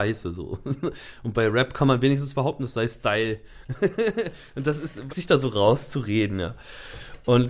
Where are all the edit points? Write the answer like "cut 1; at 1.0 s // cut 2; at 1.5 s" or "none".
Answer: cut 1; at 5.1 s